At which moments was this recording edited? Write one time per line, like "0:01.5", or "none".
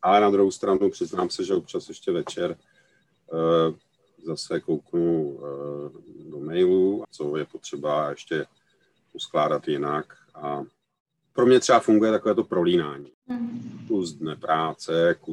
0:07.0

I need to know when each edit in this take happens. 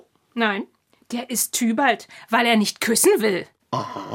none

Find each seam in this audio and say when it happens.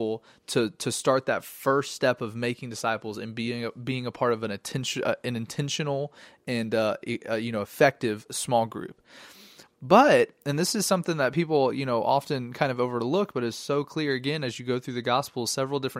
none

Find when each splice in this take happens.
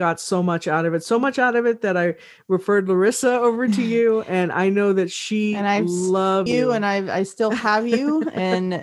0:06.5

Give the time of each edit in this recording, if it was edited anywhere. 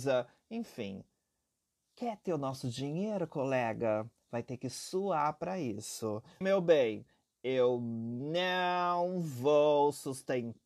0:06.4

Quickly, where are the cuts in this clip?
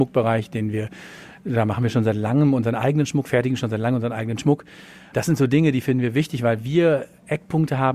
none

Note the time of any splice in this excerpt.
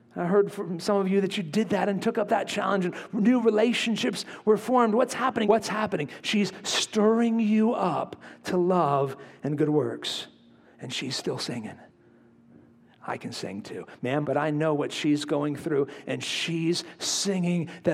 0:05.4
0:10.6
0:14.2

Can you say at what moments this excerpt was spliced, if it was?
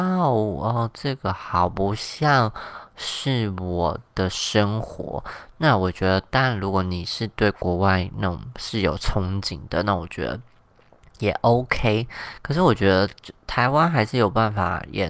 none

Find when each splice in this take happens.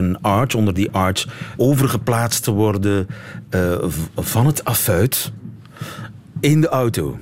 0:01.6

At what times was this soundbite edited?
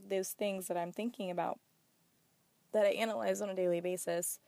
none

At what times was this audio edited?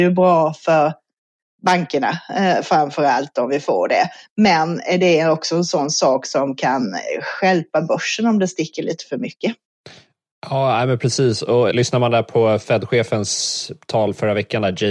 0:11.7

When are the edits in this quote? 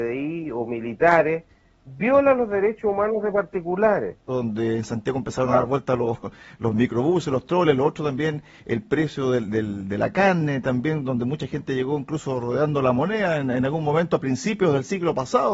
0:04.3

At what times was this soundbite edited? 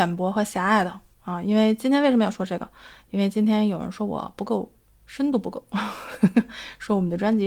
none

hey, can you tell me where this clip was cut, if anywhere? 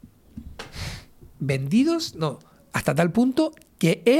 0:02.7

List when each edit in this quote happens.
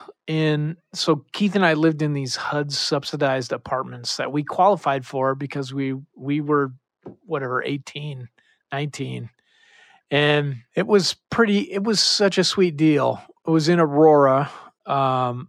none

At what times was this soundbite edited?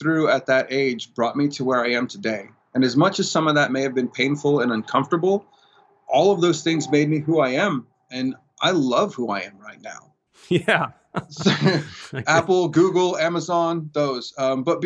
0:10.3

